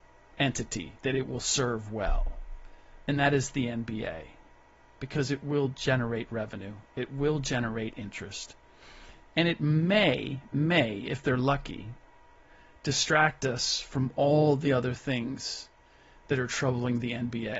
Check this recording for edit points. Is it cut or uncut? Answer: uncut